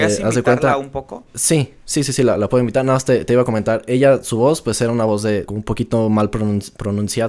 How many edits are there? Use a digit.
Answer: 1